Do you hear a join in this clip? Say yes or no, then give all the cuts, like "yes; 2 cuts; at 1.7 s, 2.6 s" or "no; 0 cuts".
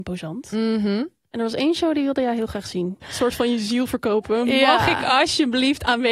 yes; 1 cut; at 3.0 s